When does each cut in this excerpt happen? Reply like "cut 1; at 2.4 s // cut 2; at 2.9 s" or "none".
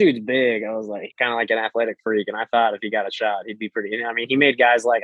cut 1; at 1.1 s